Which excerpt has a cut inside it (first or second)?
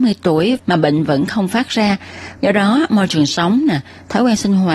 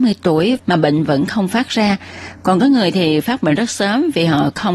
first